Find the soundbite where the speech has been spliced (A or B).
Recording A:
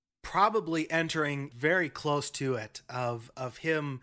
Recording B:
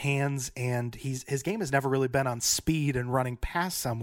A